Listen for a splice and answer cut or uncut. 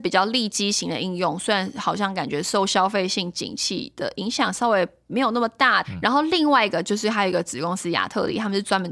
cut